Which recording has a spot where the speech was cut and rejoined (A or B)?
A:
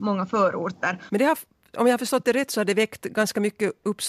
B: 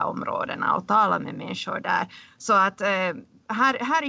A